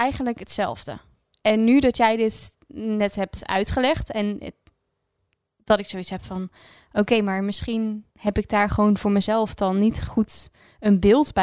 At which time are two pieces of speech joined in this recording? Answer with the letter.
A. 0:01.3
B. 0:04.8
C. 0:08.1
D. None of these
C